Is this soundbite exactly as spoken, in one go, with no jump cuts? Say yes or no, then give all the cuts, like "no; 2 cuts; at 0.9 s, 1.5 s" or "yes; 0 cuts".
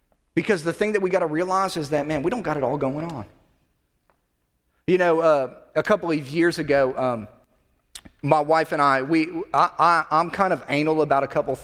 yes; 0 cuts